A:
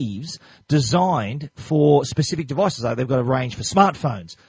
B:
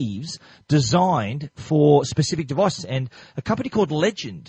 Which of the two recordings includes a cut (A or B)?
B